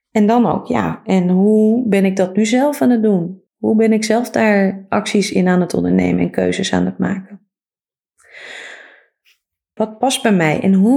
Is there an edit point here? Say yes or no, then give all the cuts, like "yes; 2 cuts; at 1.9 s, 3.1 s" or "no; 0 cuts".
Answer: yes; 2 cuts; at 3.5 s, 9.8 s